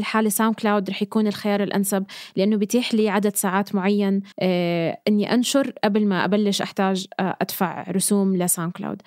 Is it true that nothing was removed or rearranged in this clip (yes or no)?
no